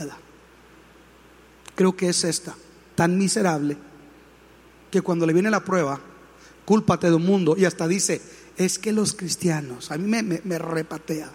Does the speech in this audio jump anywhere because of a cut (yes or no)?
no